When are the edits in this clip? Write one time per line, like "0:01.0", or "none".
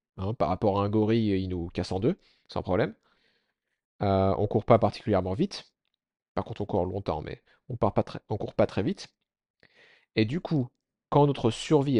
none

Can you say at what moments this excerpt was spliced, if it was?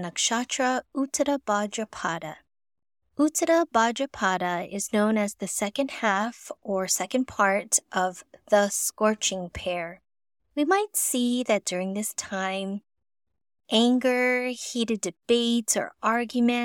0:10.4

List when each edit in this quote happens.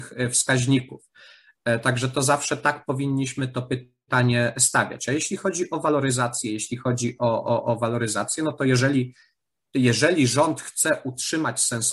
none

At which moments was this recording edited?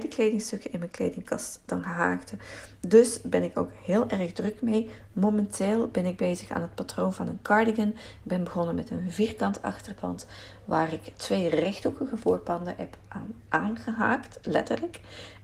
none

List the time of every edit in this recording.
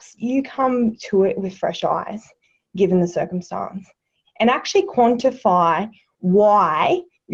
0:04.2

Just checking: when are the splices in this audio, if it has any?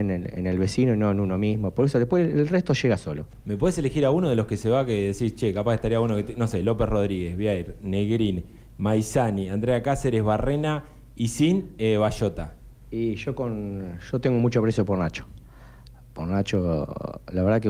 none

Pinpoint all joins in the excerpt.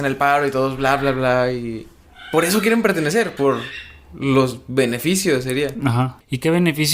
0:03.4

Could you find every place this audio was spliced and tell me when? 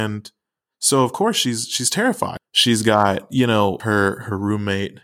0:02.4
0:03.8

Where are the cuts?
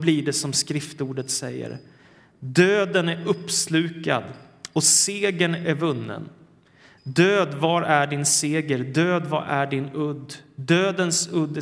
none

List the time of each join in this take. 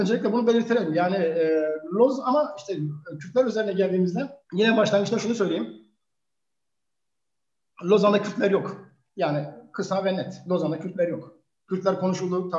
0:04.4

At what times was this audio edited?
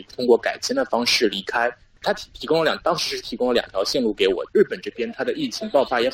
0:02.0
0:04.5

